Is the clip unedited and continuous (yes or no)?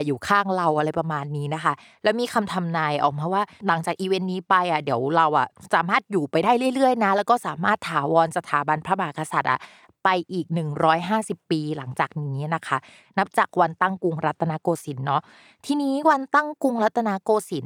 yes